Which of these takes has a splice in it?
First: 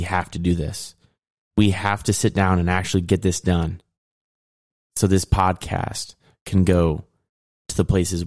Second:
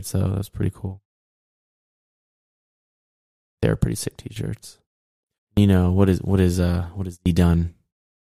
second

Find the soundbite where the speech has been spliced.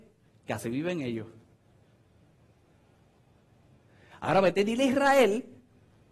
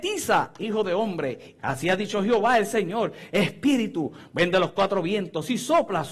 second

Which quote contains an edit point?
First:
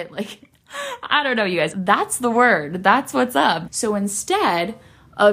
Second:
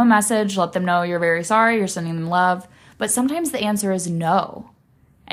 first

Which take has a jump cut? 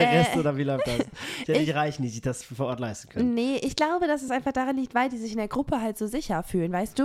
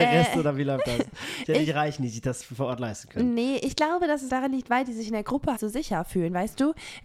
second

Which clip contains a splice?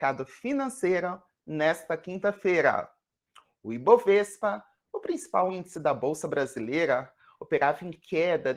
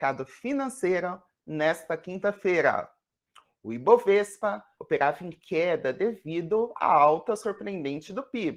second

